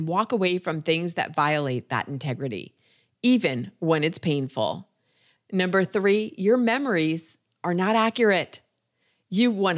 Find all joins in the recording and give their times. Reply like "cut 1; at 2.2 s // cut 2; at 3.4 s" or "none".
cut 1; at 5.4 s